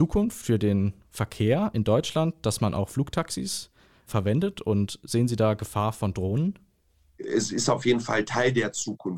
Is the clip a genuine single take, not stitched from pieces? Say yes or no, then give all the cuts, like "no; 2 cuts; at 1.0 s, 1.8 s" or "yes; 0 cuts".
yes; 0 cuts